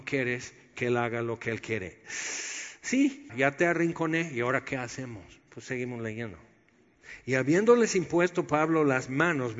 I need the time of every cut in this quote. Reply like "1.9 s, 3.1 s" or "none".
3.3 s